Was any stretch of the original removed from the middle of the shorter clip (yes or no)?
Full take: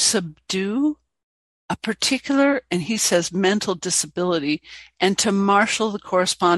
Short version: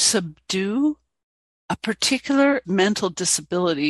yes